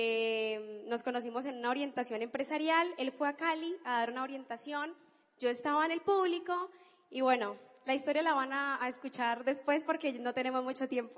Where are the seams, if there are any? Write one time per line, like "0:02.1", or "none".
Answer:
none